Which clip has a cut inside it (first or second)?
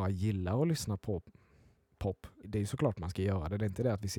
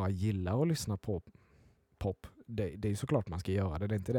first